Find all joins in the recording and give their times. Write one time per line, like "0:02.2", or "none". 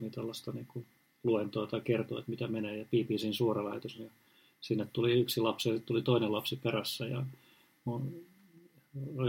none